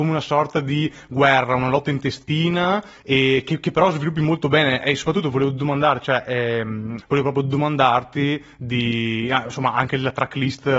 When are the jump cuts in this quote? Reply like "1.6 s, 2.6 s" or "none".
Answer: 7.0 s